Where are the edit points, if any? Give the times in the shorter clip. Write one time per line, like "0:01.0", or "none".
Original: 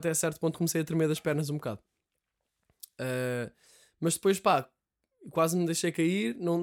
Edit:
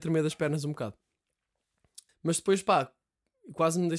0:02.1